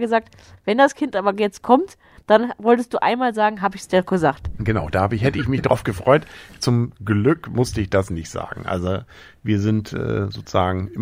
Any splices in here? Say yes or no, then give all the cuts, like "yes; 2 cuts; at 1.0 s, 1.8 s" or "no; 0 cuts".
no; 0 cuts